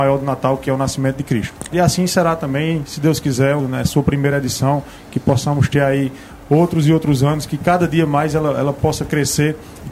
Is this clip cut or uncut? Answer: cut